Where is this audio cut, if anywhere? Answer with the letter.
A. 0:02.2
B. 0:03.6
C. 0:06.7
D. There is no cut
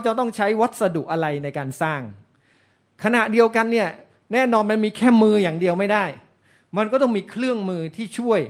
D